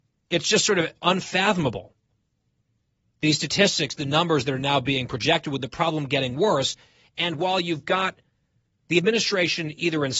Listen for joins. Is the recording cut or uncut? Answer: uncut